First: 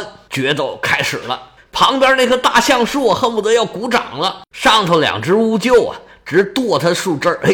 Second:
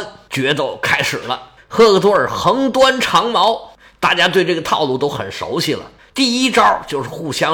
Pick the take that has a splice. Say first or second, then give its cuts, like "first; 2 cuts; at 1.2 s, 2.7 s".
first; 1 cut; at 1.6 s